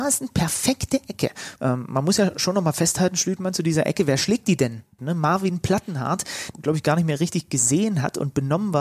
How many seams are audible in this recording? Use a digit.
3